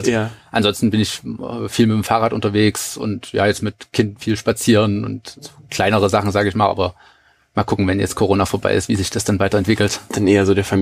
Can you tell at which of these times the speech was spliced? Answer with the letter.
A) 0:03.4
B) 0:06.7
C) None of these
C